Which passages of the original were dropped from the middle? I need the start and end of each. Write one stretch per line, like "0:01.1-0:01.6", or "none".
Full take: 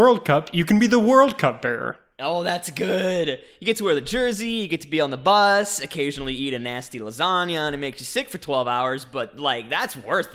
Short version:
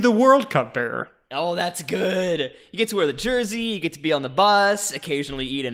none